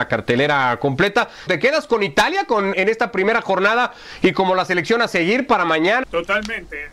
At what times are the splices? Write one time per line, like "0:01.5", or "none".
0:01.5
0:02.7
0:06.0